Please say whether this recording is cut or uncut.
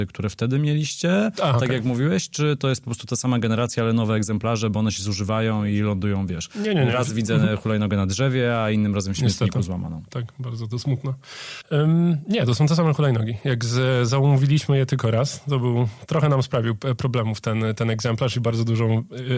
uncut